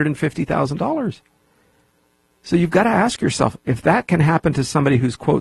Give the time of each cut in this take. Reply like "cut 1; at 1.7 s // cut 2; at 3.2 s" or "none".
none